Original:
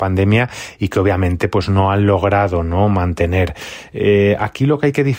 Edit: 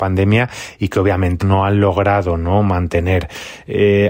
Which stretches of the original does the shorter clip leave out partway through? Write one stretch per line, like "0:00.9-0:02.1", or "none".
0:01.4-0:01.7